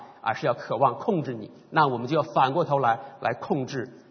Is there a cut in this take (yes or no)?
no